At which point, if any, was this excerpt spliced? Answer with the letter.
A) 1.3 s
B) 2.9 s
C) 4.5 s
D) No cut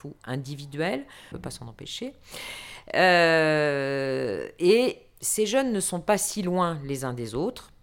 A